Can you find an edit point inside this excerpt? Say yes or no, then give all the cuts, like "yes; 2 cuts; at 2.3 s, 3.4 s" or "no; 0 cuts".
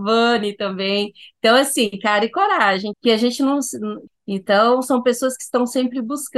yes; 2 cuts; at 2.9 s, 4.1 s